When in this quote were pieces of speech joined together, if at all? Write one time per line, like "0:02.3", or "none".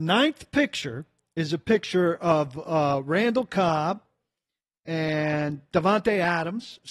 none